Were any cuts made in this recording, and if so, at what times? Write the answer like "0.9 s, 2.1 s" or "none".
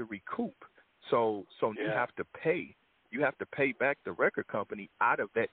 1.7 s

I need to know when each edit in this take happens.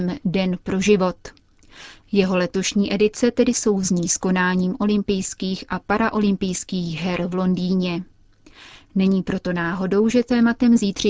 none

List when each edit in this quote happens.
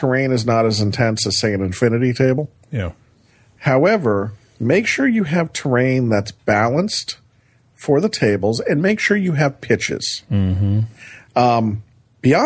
11.3 s

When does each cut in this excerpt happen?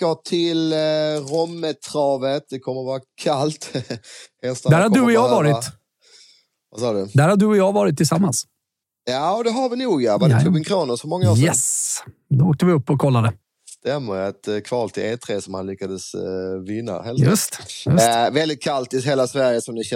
none

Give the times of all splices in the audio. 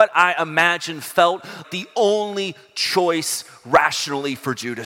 1.6 s

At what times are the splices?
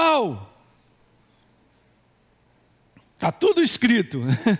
none

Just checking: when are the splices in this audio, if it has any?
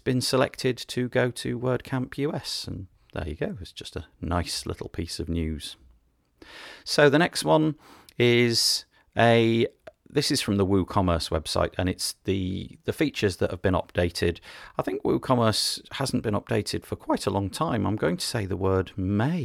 none

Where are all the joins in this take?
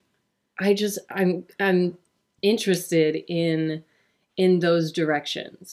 none

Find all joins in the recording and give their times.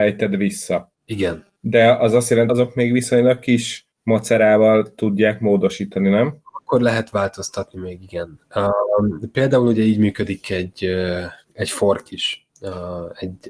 2.5 s

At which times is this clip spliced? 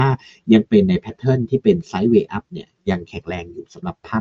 none

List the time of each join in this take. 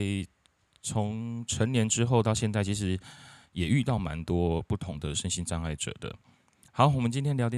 6.7 s

